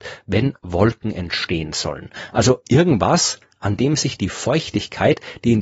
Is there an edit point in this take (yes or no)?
no